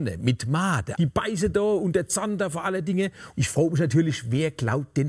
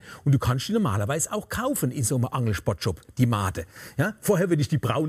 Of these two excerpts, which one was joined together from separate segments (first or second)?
first